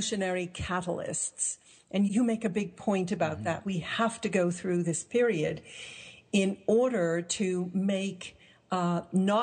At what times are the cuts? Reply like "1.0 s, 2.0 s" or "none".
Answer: 2.1 s, 3.6 s